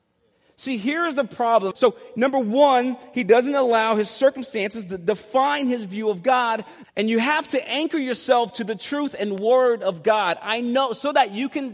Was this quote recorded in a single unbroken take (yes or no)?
no